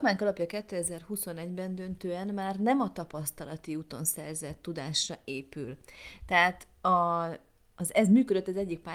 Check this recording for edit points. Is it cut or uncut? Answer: uncut